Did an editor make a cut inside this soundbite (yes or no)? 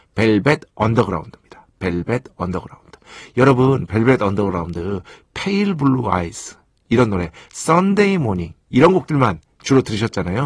no